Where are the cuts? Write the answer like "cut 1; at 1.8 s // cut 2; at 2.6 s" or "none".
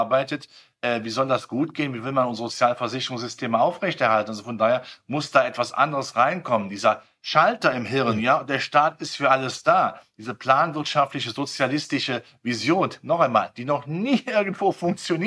none